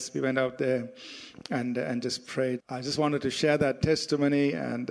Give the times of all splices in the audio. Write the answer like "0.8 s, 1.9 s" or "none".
2.6 s